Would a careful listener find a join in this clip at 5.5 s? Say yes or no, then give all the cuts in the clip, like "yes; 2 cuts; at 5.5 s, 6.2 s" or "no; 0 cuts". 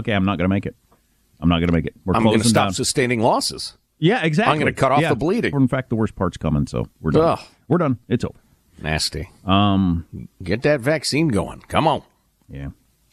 yes; 1 cut; at 5.5 s